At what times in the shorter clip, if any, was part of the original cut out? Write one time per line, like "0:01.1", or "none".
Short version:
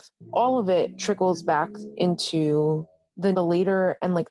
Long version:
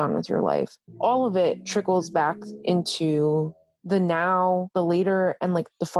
0:03.3

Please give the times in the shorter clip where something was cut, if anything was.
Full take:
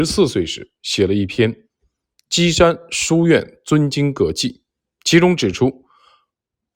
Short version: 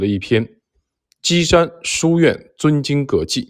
none

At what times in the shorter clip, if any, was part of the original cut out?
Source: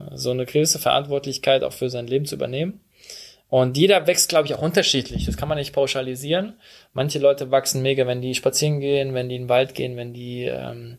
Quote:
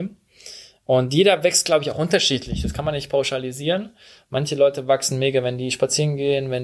none

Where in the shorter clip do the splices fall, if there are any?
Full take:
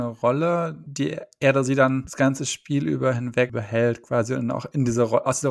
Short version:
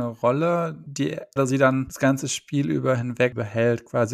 0:01.4

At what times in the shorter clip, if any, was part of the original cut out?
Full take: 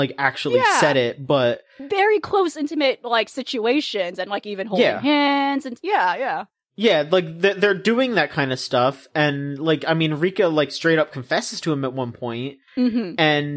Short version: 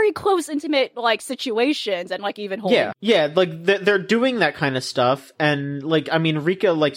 0:02.9

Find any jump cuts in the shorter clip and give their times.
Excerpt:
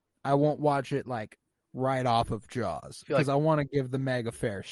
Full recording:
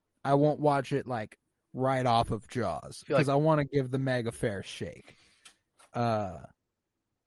none

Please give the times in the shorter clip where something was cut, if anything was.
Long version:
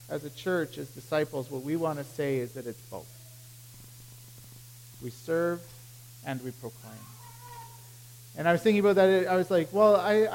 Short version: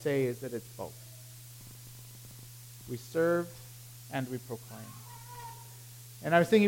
none

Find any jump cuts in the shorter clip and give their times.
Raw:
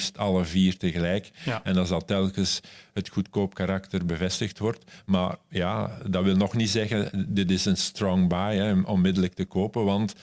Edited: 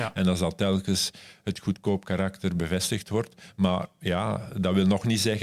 none

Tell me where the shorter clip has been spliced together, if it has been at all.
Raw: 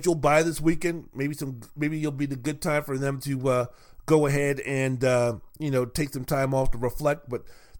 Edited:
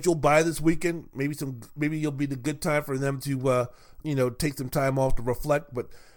0:04.0

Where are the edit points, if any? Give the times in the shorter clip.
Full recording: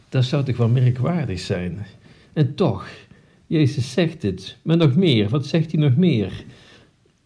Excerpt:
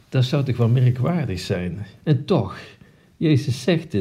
0:02.0

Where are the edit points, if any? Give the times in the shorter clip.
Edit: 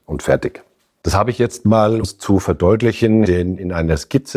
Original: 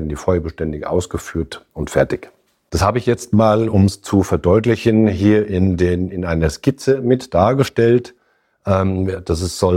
0:02.0
0:03.2

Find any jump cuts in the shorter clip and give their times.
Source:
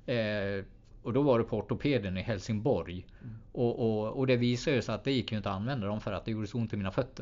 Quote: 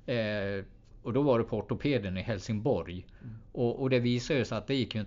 0:03.8

